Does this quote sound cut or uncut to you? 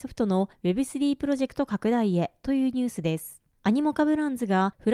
uncut